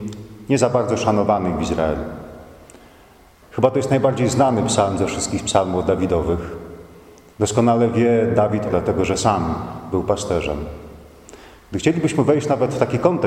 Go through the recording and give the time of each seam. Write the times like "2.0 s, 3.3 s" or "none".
3.4 s, 7.3 s, 8.7 s

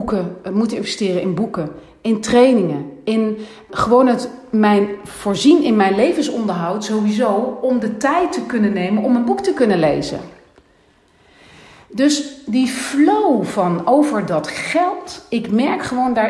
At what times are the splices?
3.7 s

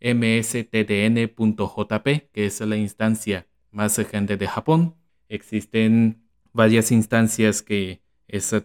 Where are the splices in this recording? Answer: none

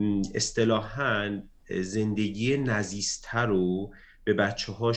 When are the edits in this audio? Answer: none

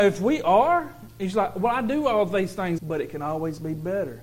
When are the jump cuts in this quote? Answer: 2.8 s

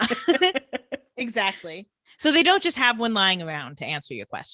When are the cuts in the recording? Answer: none

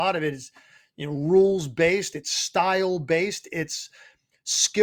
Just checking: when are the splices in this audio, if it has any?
none

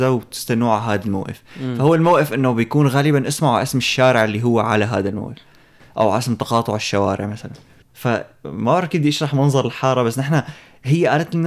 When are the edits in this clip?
none

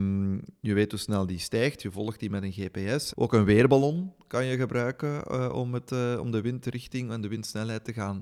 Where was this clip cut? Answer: 3.1 s

